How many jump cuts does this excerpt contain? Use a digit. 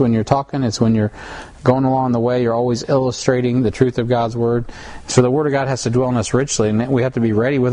0